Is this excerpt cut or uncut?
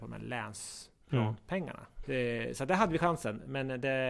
cut